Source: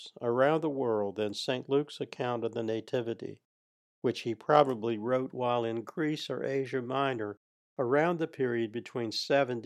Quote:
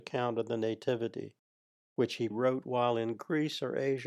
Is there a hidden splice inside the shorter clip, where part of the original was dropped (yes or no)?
yes